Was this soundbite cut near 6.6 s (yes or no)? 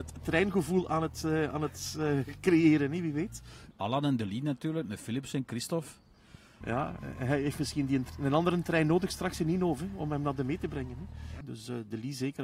yes